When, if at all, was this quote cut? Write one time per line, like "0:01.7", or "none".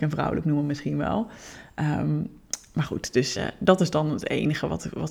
none